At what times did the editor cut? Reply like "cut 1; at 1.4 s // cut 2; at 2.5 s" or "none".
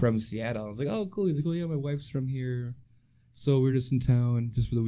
none